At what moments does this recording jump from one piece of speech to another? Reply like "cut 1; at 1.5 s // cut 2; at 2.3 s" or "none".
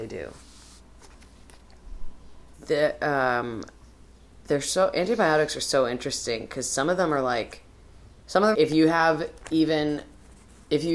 cut 1; at 2.5 s // cut 2; at 4.4 s // cut 3; at 8.5 s